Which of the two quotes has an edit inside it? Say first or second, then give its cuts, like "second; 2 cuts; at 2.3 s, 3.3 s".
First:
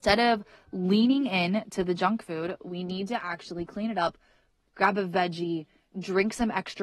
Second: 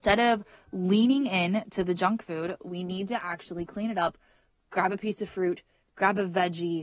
first; 1 cut; at 4.6 s